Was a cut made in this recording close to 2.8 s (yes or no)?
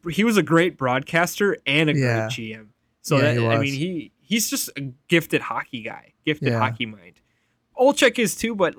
no